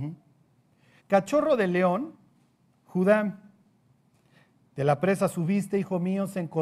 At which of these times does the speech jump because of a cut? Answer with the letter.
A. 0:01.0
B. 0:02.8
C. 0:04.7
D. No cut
A